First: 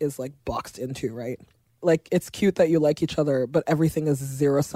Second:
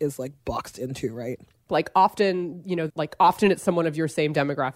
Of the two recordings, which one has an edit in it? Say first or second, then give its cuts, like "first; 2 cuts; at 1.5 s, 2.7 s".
second; 2 cuts; at 1.7 s, 2.9 s